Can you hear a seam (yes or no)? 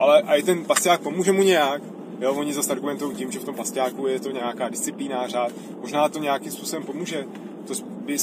no